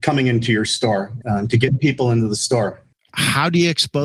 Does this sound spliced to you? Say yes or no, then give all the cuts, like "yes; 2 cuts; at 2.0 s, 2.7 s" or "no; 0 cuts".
yes; 2 cuts; at 1.2 s, 2.9 s